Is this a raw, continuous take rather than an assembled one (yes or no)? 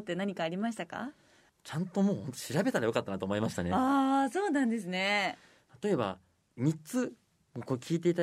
yes